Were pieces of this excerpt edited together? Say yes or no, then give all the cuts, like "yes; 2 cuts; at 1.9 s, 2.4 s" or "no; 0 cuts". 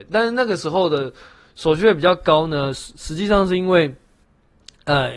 no; 0 cuts